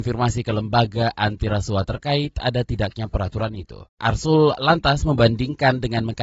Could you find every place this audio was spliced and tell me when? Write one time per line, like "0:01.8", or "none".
none